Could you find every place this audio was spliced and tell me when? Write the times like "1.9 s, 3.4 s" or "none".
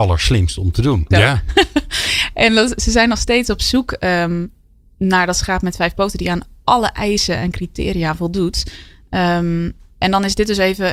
1.1 s